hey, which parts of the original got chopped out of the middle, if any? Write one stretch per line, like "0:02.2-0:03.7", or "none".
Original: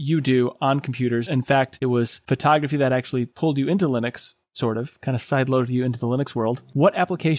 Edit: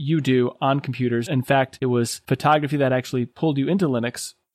none